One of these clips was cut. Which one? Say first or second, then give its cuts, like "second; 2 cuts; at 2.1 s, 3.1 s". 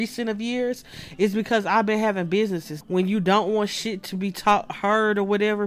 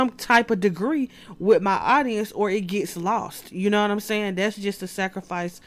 first; 1 cut; at 2.8 s